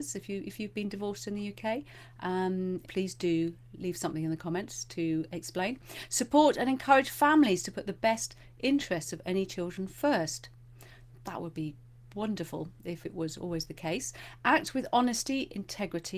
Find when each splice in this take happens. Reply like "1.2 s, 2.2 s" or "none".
2.8 s